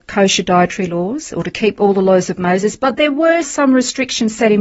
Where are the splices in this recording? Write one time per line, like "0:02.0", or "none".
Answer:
0:03.4